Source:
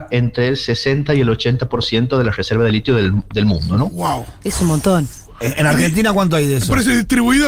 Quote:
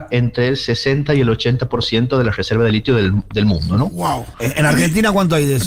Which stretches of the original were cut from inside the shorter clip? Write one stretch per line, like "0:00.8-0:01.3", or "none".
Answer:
0:04.3-0:05.3